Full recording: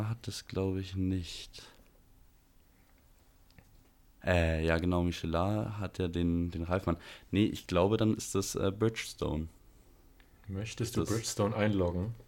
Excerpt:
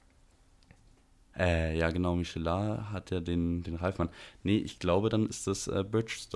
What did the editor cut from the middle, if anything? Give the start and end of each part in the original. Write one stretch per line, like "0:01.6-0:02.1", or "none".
none

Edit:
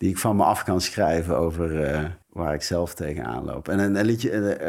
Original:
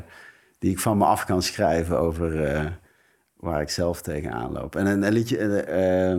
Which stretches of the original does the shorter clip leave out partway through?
0:02.8-0:03.3

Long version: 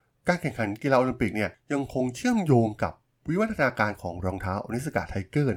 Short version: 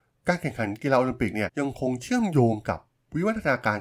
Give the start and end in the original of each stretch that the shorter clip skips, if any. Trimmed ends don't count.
0:01.5-0:01.6

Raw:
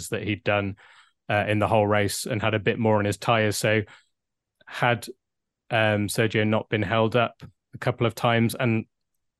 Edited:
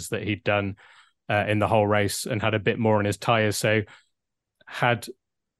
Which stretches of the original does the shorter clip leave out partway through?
none

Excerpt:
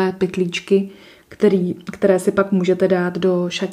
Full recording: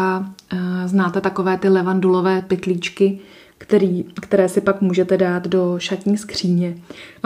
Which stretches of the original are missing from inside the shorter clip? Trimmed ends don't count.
none

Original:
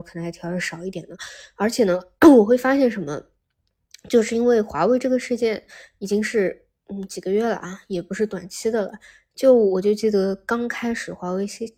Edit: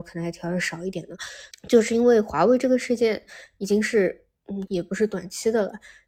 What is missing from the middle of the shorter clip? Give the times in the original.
0:01.5-0:03.9
0:07.1-0:07.9

